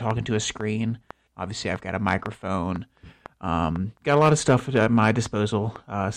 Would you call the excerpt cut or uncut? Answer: cut